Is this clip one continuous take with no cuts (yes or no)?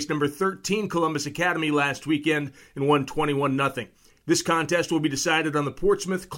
yes